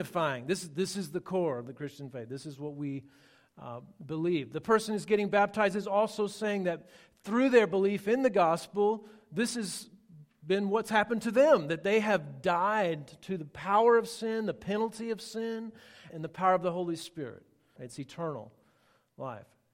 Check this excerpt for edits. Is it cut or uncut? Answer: cut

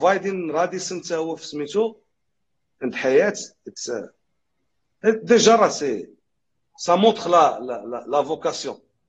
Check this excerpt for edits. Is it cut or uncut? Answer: uncut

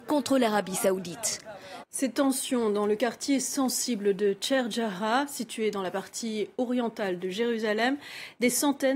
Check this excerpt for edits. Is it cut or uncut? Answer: cut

